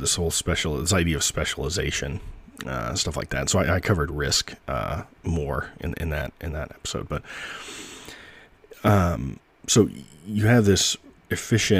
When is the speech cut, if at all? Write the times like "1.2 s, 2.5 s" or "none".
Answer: none